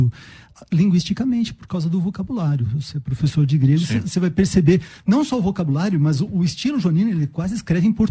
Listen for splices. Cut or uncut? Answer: uncut